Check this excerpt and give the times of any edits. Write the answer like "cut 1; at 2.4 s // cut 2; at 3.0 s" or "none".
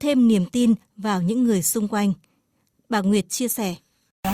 none